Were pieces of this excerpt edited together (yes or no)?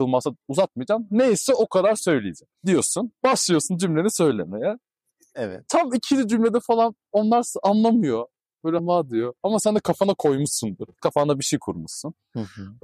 yes